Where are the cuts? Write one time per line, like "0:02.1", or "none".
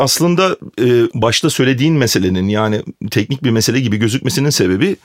0:01.1